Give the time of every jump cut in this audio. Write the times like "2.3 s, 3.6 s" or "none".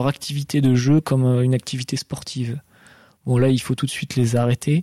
none